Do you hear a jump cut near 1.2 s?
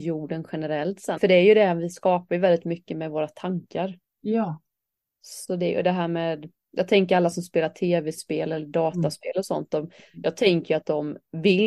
yes; 1 cut; at 1.2 s

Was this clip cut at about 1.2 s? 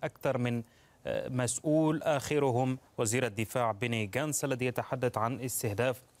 no; 1 cut; at 2.9 s

